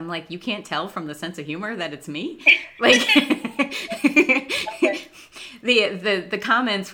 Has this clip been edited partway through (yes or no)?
no